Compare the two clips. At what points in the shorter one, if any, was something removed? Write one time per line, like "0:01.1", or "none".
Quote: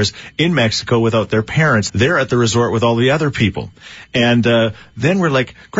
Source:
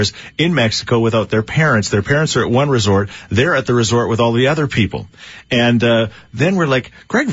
0:01.9